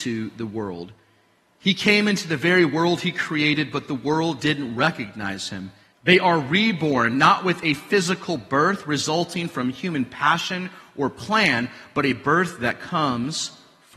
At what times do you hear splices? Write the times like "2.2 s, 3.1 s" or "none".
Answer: 5.9 s